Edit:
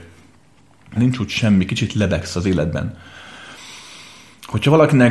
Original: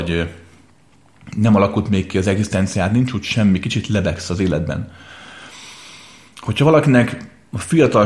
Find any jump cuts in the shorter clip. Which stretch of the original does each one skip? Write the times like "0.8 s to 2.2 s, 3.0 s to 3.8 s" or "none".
1.3 s to 2.9 s